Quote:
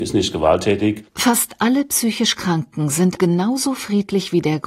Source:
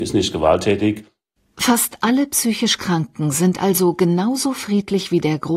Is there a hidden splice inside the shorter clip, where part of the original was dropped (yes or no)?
yes